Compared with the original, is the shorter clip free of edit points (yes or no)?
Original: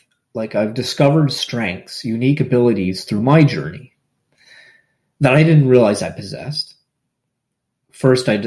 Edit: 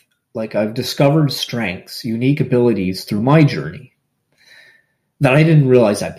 yes